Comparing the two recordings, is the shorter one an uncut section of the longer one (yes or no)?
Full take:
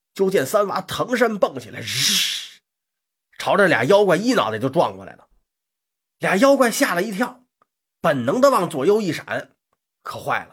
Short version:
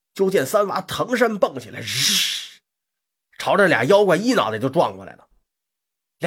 yes